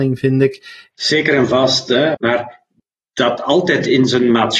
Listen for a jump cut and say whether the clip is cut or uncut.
cut